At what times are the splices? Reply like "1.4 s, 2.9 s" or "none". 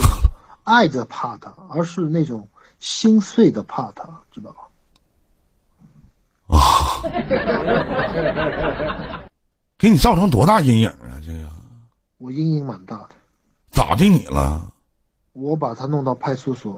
none